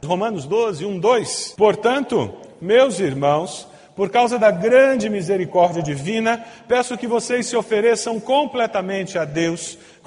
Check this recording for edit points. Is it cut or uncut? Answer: uncut